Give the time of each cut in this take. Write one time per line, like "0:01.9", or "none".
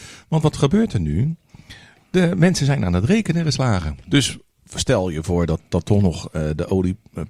0:04.0